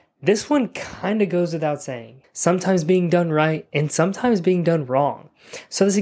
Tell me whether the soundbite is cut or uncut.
cut